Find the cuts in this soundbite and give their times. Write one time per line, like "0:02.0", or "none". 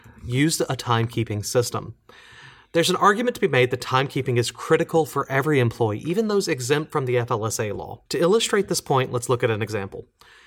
0:08.1